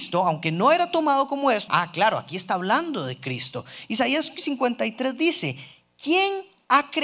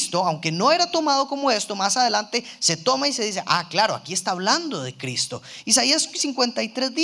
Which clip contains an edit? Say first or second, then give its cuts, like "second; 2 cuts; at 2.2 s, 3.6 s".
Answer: first; 1 cut; at 1.7 s